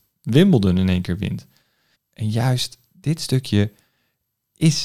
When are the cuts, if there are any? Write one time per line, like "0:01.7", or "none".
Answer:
0:01.9